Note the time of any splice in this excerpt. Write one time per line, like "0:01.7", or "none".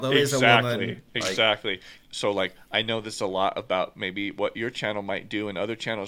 0:02.0